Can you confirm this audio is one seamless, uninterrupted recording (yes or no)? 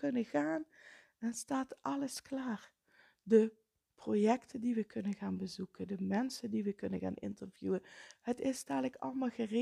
yes